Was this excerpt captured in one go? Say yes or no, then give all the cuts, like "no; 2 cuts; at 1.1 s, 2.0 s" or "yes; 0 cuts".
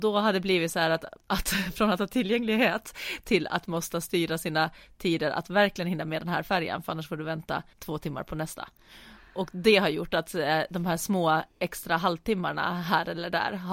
no; 1 cut; at 7.7 s